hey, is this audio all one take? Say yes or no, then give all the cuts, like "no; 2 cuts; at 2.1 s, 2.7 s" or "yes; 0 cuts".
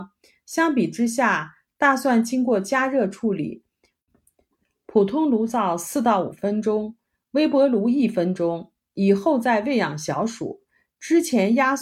yes; 0 cuts